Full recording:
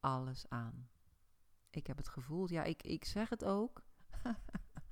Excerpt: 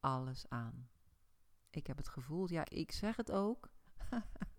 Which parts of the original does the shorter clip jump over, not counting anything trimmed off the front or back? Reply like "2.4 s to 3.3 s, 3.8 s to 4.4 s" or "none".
2.6 s to 2.8 s